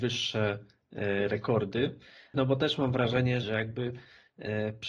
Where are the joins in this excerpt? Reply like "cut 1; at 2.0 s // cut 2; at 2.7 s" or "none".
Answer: cut 1; at 2.3 s // cut 2; at 3.4 s